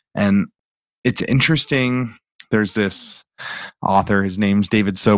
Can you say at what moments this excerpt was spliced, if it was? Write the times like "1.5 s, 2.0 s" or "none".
none